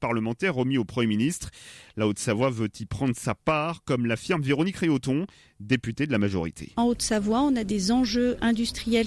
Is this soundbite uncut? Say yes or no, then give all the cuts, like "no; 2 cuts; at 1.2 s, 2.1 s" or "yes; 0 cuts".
yes; 0 cuts